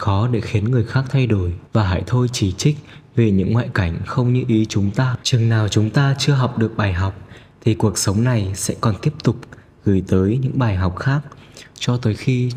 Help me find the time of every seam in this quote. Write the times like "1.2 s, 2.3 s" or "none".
1.7 s, 5.2 s